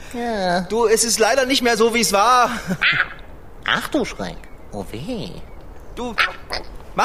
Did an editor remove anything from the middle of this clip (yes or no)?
no